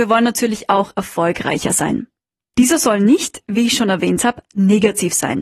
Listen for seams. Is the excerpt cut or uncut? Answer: cut